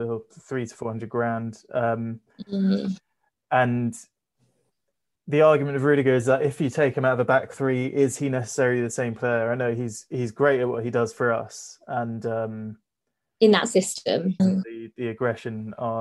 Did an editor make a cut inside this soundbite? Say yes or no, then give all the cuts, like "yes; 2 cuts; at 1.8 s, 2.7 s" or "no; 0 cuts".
yes; 1 cut; at 14.4 s